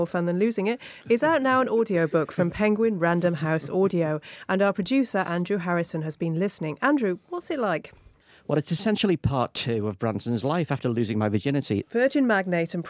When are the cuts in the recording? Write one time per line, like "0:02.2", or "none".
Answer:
0:11.8